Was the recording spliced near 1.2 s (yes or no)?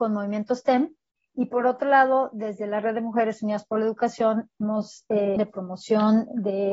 no